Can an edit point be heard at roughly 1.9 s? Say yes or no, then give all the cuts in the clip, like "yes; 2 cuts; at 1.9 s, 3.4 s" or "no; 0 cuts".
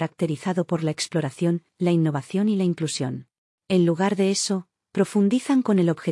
no; 1 cut; at 3.5 s